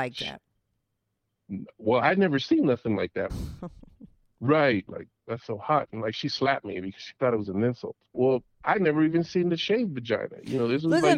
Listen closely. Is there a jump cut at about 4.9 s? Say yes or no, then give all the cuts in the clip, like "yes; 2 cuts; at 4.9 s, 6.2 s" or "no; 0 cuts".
yes; 3 cuts; at 3.3 s, 4.9 s, 8.1 s